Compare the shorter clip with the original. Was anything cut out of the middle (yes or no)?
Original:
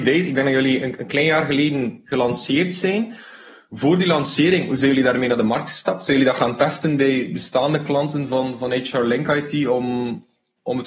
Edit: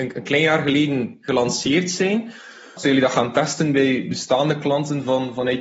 yes